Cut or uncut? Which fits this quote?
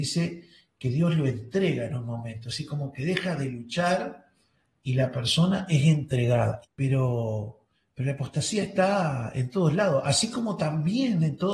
cut